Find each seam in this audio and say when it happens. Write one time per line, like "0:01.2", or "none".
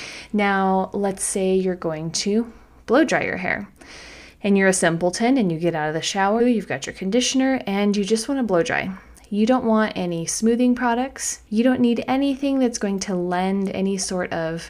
0:06.4
0:11.5